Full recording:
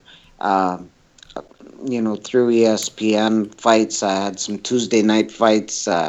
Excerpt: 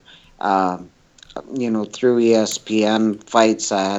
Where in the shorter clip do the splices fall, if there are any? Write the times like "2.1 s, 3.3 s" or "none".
1.4 s